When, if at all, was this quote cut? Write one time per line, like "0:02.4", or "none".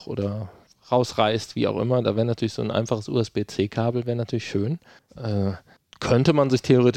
0:05.1